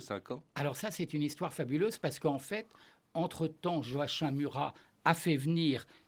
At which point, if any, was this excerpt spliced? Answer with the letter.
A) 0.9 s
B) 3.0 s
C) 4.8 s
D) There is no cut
D